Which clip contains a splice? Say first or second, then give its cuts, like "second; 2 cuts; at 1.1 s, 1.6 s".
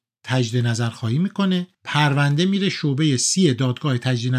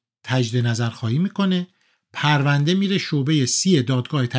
first; 1 cut; at 1.7 s